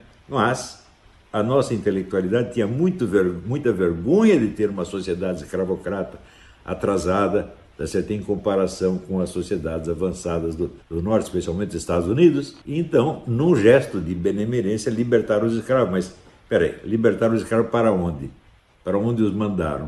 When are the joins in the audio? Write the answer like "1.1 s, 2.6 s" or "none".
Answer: 10.8 s, 12.6 s